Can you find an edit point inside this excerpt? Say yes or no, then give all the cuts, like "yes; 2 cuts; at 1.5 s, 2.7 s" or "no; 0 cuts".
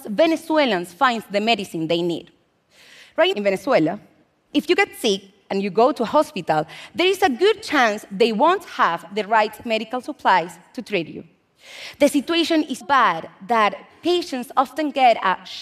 yes; 2 cuts; at 3.3 s, 12.8 s